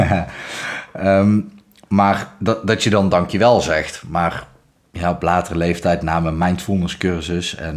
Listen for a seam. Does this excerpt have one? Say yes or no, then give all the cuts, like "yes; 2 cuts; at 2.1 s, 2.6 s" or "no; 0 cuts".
no; 0 cuts